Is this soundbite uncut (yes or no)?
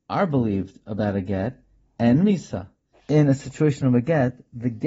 no